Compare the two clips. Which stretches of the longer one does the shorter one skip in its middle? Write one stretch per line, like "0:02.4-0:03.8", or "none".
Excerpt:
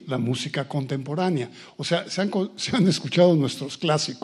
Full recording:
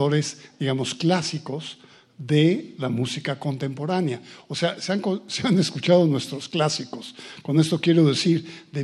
none